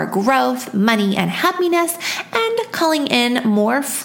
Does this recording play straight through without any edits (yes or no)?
yes